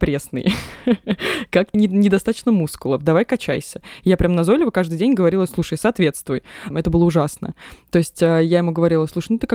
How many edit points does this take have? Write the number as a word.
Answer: two